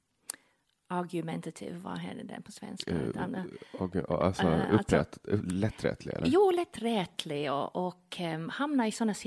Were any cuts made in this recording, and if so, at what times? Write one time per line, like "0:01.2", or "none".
none

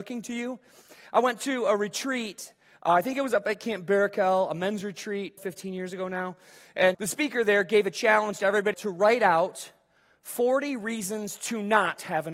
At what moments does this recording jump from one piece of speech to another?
0:05.4
0:06.9
0:08.7

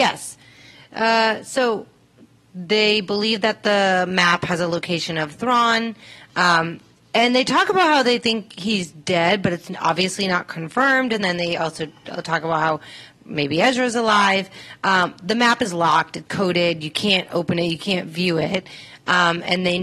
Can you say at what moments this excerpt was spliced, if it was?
0:16.3

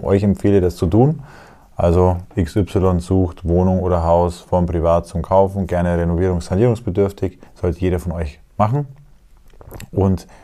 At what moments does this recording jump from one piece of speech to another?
0:07.5

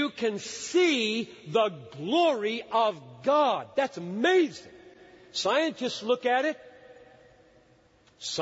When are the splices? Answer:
none

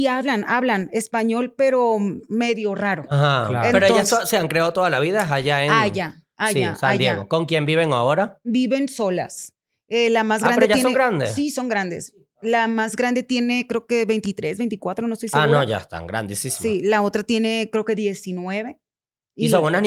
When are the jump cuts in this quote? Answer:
none

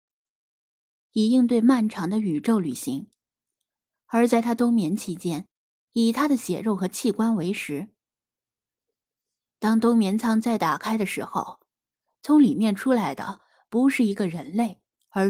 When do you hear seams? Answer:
0:01.1
0:05.9

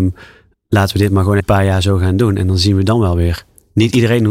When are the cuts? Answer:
0:01.4

